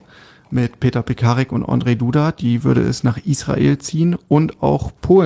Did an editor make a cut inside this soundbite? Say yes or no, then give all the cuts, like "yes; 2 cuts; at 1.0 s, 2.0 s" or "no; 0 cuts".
no; 0 cuts